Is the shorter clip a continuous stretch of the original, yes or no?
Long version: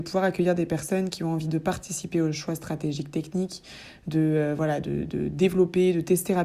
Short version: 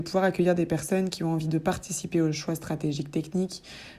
yes